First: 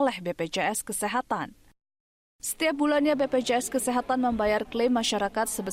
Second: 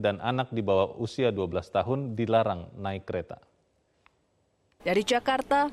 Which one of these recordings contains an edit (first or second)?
second